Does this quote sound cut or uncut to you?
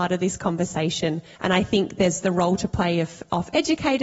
cut